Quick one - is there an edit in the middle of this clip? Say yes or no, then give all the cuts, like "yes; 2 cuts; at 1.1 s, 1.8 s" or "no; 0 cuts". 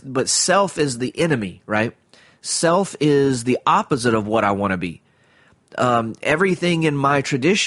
no; 0 cuts